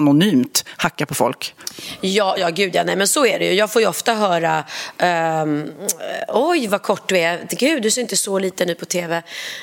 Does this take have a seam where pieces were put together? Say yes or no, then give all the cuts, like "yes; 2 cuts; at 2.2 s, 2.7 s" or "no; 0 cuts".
yes; 1 cut; at 2.4 s